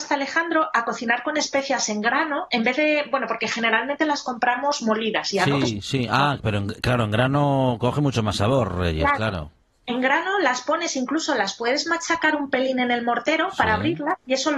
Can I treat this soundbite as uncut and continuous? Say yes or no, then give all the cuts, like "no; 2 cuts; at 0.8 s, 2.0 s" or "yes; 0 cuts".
yes; 0 cuts